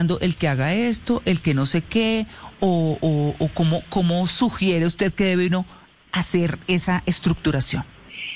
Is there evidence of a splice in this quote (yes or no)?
no